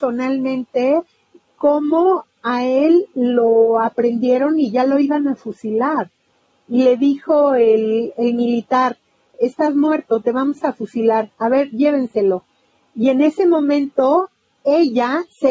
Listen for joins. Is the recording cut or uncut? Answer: cut